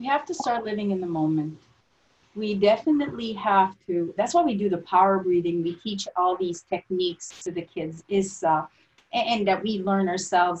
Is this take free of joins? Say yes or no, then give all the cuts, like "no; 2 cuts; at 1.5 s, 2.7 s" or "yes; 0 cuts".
no; 1 cut; at 4.2 s